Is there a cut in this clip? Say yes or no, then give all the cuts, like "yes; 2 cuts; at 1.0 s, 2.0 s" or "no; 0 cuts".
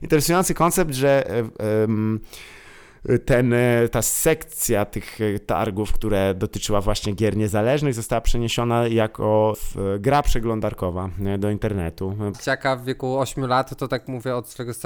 yes; 2 cuts; at 9.5 s, 12.3 s